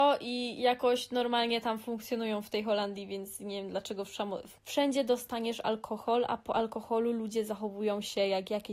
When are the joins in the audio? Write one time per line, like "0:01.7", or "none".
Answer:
0:04.6